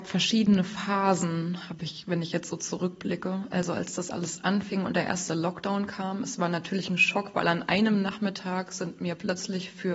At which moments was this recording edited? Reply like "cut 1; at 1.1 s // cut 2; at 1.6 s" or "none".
none